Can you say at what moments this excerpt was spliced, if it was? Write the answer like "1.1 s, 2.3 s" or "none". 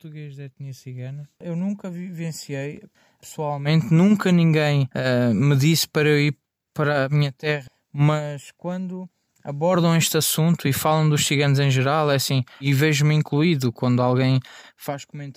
1.3 s, 12.6 s